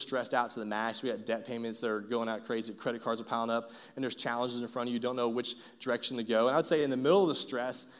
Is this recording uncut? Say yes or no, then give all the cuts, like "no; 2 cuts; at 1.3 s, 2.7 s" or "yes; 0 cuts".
yes; 0 cuts